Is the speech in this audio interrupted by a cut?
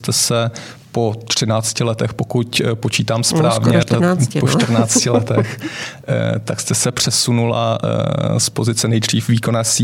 no; 0 cuts

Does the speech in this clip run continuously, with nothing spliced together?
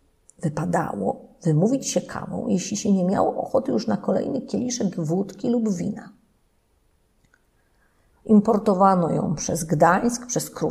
no; 1 cut; at 8.1 s

